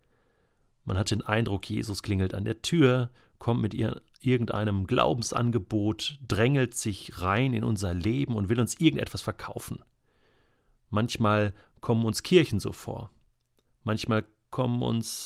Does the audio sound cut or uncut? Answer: uncut